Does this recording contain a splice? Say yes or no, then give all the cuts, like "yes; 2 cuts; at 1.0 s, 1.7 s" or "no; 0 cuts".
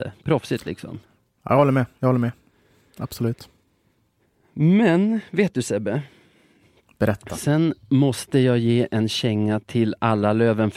no; 0 cuts